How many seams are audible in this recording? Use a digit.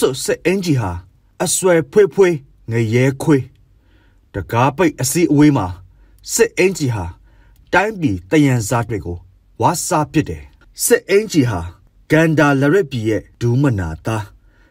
1